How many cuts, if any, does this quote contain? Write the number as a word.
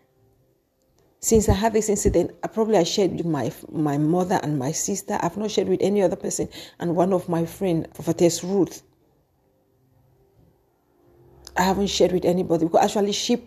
two